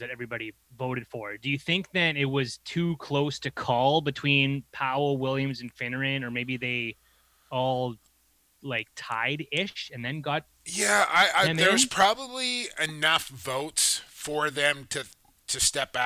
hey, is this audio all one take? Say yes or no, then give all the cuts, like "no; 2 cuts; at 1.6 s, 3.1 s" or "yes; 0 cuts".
yes; 0 cuts